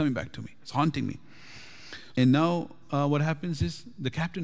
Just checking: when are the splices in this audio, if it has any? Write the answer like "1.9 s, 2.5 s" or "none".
2.1 s